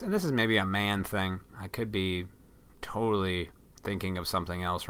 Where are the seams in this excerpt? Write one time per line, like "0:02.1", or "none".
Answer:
0:01.5